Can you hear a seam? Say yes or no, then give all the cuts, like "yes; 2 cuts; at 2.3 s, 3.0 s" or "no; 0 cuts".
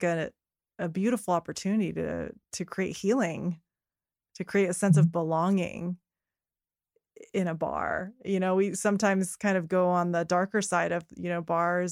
no; 0 cuts